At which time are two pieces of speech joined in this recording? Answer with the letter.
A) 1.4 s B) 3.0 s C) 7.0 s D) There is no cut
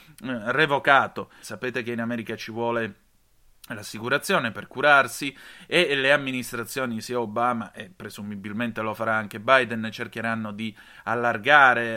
A